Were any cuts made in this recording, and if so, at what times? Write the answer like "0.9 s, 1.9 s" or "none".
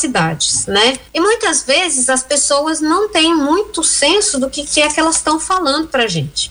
1.1 s